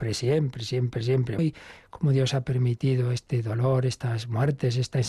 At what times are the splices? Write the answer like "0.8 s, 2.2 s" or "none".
1.4 s